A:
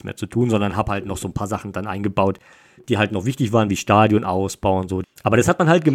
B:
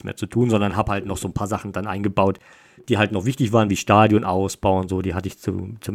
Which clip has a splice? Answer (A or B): A